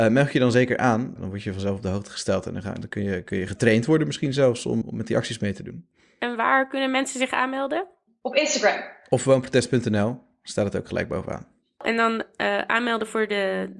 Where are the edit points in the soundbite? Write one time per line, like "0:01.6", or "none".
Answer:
0:04.8